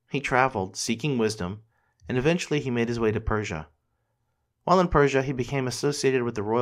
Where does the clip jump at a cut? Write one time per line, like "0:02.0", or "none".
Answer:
none